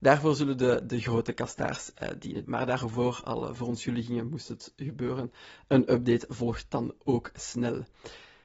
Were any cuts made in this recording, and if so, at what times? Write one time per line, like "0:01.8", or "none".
0:02.4